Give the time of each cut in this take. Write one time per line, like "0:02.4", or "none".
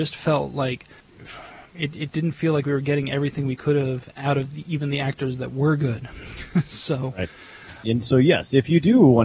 0:02.1
0:07.8